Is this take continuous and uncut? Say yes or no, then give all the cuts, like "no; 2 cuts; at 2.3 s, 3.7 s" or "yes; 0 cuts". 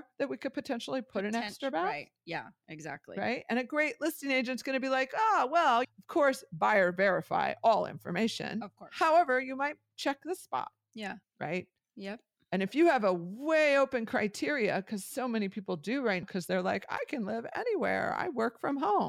no; 3 cuts; at 5.8 s, 11.2 s, 16.2 s